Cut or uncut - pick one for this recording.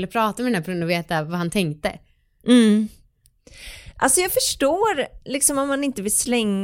uncut